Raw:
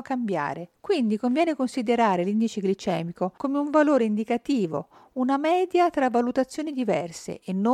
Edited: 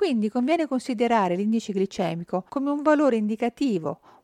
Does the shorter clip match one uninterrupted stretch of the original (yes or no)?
yes